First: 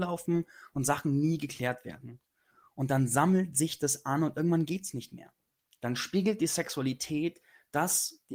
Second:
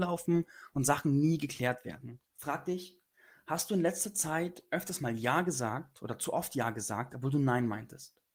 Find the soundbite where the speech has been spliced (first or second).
second